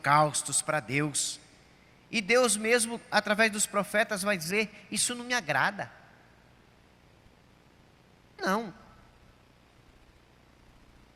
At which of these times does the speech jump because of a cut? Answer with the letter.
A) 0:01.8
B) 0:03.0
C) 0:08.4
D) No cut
C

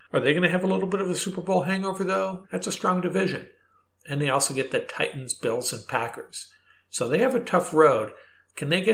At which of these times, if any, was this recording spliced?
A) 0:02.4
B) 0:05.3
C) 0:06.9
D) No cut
A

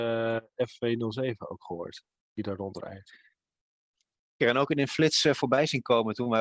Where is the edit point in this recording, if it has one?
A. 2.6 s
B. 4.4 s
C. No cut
B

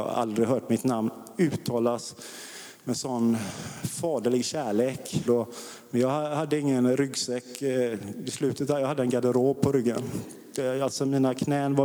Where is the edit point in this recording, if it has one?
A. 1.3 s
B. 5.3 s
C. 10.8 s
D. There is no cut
B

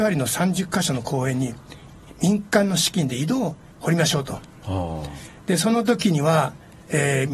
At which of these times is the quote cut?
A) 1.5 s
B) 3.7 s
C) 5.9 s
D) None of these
B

